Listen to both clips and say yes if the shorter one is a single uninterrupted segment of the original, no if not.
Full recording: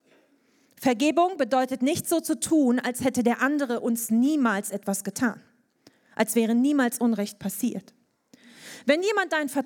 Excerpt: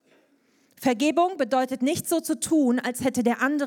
yes